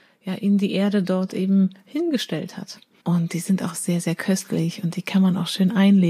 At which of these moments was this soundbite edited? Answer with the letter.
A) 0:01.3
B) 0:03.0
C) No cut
B